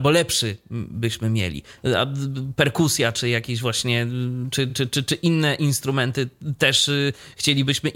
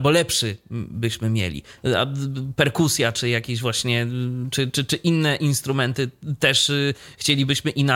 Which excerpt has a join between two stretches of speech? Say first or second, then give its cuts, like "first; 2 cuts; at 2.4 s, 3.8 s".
second; 1 cut; at 4.7 s